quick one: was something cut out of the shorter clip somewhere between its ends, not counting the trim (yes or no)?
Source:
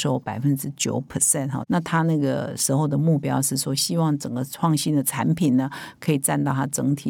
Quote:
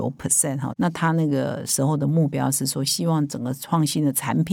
no